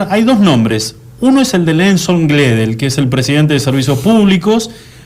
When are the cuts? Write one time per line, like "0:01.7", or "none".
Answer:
none